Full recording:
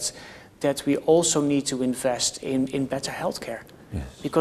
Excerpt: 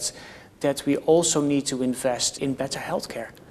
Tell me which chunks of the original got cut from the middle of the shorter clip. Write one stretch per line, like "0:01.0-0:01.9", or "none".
0:02.4-0:02.7